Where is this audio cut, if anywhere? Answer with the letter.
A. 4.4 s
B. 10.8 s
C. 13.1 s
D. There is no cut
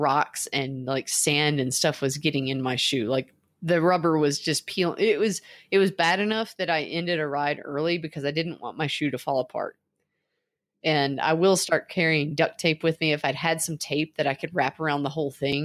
D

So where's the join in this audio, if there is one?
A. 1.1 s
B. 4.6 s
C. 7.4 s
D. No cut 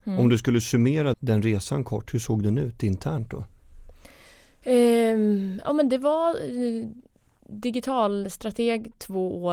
A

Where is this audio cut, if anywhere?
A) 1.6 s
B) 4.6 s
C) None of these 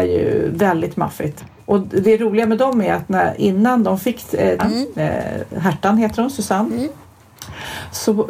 B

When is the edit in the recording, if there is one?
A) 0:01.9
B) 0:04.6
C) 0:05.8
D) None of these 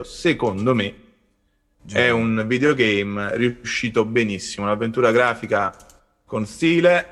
D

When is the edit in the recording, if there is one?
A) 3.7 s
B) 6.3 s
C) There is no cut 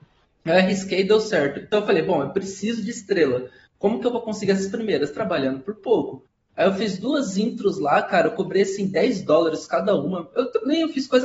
C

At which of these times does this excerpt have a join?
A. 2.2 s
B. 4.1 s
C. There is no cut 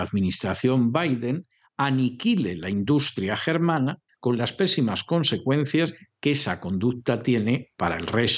B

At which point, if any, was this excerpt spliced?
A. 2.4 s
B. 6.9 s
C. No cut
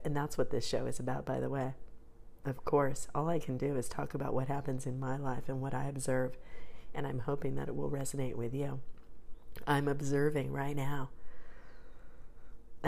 C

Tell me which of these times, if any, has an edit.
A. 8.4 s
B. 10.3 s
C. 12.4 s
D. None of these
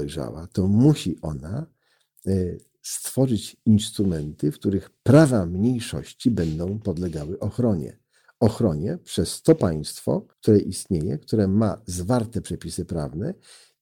B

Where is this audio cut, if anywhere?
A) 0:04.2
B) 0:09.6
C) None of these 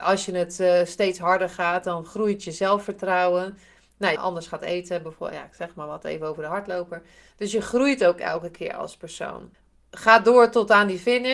A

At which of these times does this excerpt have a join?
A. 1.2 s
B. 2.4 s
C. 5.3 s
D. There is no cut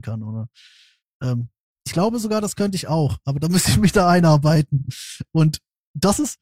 D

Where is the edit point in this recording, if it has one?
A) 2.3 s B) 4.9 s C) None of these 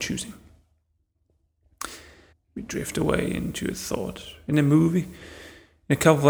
A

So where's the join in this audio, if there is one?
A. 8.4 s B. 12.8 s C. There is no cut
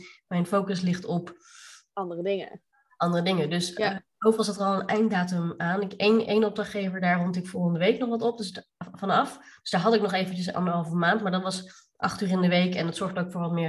C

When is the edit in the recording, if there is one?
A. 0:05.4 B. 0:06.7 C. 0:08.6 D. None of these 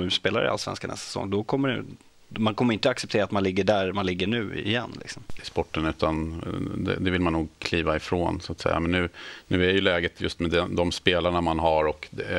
A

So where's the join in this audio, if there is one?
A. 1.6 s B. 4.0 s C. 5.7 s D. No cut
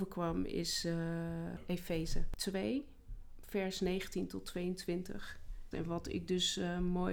C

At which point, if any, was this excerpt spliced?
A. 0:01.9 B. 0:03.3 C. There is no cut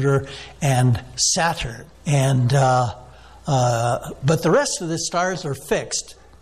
A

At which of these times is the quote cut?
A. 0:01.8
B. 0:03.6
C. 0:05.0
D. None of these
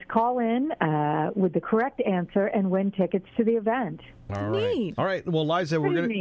C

